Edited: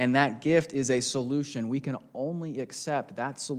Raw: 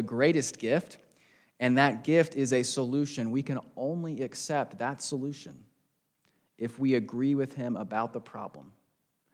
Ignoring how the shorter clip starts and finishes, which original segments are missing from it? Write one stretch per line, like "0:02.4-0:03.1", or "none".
none